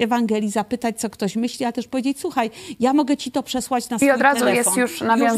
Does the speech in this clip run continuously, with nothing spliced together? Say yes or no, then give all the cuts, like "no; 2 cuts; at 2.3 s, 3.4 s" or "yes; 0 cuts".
yes; 0 cuts